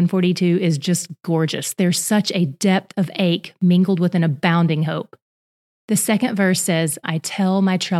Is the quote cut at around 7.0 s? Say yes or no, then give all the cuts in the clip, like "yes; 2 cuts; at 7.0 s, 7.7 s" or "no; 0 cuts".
yes; 1 cut; at 7.0 s